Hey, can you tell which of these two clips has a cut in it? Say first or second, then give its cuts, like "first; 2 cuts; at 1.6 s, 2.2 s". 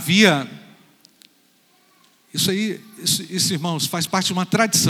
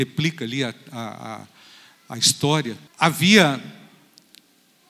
second; 1 cut; at 2.9 s